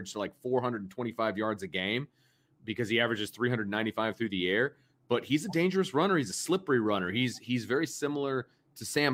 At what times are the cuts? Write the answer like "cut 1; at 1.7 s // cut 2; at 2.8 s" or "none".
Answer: none